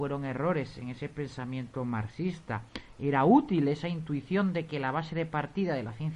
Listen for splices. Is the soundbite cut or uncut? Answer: uncut